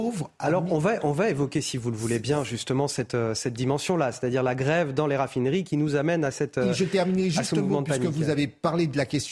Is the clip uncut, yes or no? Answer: yes